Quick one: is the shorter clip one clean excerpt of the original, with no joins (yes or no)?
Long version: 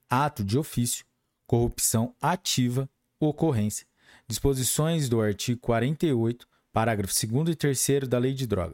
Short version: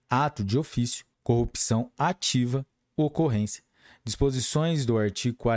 no